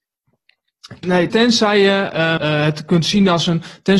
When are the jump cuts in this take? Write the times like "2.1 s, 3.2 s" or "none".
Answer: 1.3 s, 2.4 s